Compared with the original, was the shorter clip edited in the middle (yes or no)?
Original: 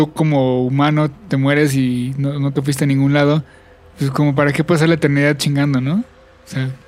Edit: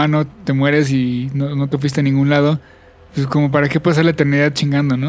no